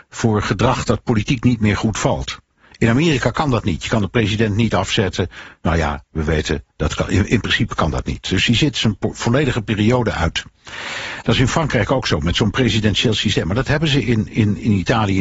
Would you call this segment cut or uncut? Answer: uncut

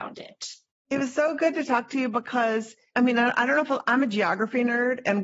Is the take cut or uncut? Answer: uncut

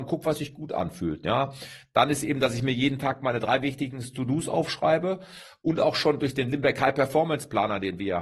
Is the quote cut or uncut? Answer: uncut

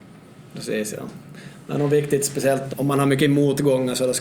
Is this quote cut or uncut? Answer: cut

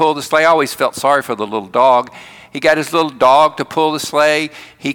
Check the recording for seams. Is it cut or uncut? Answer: uncut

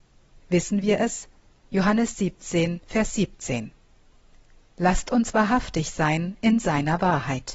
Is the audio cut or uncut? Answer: cut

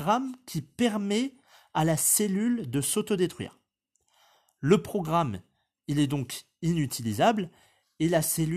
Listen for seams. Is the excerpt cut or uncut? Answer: uncut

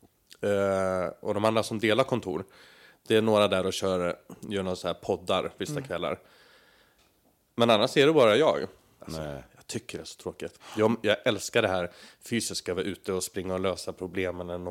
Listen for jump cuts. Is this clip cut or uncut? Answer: cut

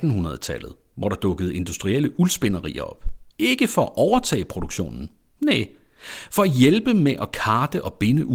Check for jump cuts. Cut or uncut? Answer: cut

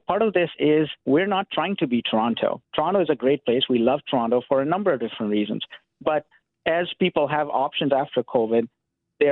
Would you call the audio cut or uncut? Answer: uncut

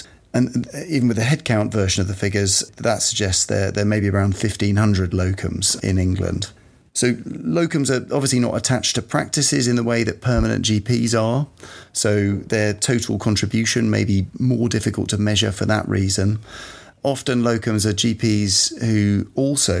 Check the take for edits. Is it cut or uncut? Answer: uncut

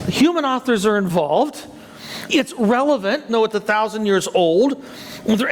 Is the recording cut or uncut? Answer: cut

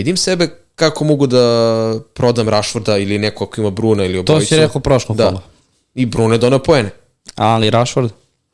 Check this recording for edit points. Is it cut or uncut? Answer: uncut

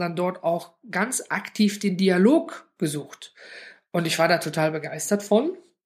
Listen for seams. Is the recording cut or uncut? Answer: uncut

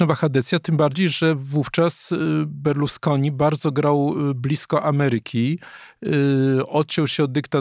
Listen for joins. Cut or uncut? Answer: uncut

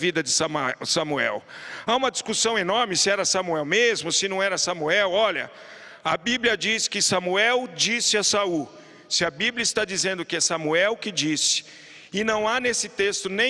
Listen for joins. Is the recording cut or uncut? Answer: uncut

